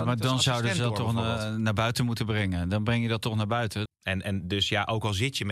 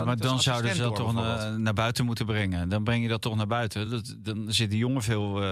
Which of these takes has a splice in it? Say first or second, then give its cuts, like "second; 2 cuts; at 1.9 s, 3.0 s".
first; 1 cut; at 3.9 s